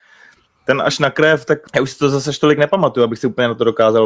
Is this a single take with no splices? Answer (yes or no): no